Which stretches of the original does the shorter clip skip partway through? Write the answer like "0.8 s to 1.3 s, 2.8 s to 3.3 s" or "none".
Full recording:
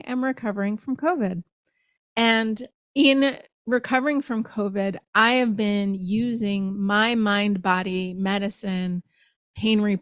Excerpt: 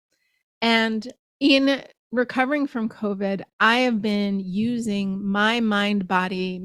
none